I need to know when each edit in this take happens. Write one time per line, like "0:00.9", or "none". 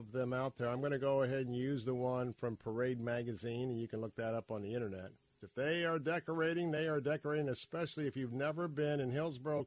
0:05.4